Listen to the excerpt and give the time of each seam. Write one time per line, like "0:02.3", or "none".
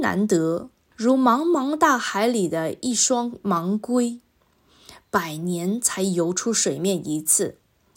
0:00.9